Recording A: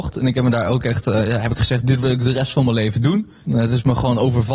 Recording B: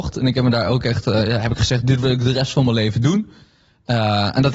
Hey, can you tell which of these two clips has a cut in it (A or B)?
A